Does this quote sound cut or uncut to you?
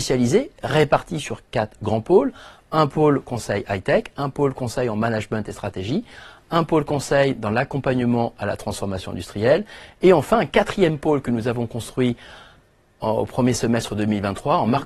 uncut